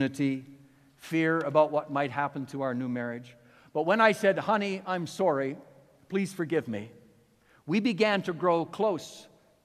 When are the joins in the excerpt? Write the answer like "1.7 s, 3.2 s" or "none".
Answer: none